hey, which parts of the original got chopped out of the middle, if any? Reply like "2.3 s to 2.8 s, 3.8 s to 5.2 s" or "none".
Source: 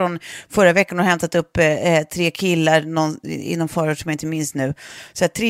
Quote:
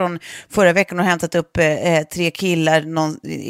none